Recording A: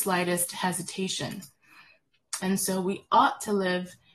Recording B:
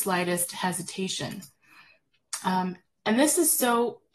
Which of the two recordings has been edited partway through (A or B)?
A